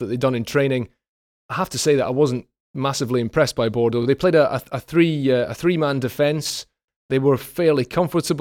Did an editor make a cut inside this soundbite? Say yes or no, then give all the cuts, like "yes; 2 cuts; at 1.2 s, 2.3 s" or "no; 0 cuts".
no; 0 cuts